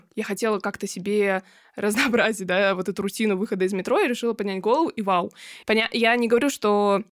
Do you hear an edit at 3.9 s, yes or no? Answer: no